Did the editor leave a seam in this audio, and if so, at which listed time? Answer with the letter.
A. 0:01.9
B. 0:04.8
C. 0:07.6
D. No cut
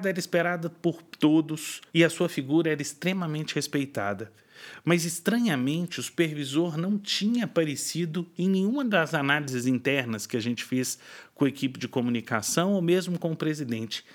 A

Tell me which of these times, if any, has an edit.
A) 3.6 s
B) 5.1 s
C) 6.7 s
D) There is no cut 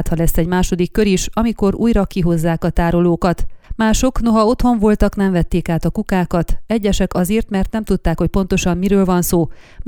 A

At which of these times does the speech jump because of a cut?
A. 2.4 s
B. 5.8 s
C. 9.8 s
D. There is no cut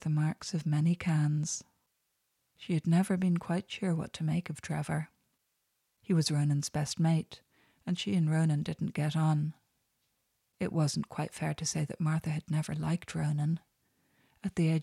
A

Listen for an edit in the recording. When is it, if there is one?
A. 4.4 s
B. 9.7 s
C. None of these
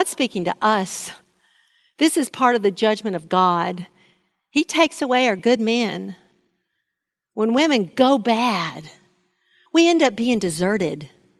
B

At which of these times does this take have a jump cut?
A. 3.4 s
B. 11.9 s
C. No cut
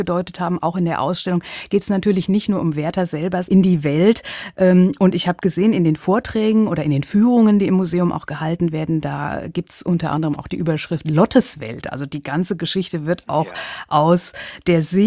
A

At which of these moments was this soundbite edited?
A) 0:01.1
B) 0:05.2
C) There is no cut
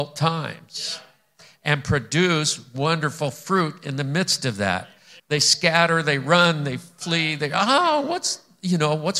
B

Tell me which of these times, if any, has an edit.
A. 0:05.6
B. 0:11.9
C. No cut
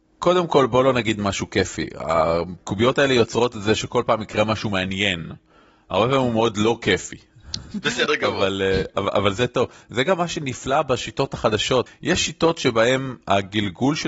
B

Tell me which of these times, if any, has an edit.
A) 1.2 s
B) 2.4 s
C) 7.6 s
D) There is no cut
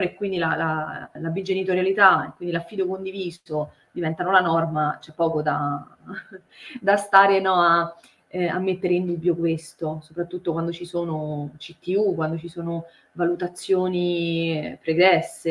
A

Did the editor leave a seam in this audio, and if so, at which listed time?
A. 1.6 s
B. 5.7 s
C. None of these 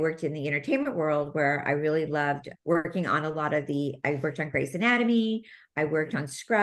C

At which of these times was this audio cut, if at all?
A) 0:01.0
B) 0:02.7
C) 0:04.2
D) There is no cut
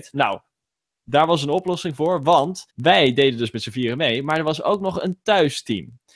B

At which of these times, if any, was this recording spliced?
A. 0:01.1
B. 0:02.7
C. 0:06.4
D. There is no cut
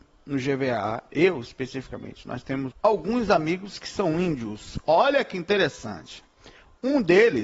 B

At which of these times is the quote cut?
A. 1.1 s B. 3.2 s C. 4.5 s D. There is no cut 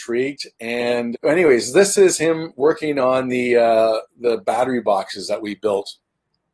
A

